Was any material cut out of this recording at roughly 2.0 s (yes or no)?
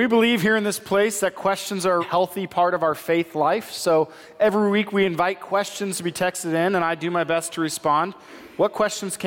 yes